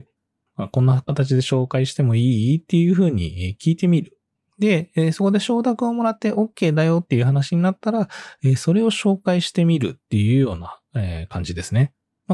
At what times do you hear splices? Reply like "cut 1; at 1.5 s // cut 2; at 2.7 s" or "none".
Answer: none